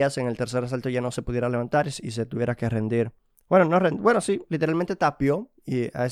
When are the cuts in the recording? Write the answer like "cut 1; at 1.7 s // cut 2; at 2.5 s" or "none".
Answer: none